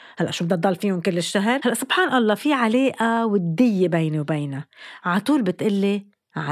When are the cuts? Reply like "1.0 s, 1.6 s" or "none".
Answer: 1.6 s